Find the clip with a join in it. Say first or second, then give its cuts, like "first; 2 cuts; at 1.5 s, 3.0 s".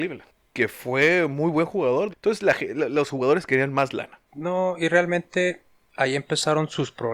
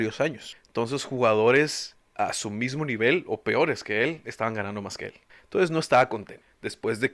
first; 2 cuts; at 2.1 s, 4.3 s